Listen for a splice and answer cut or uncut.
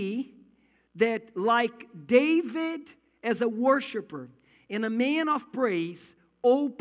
uncut